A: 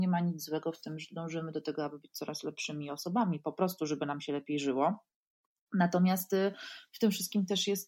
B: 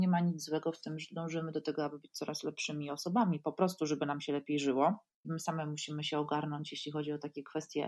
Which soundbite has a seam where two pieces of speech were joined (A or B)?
B